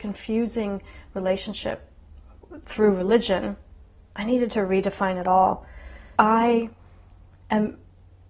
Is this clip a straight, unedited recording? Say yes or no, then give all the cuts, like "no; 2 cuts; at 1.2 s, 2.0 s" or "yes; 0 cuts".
no; 1 cut; at 6.2 s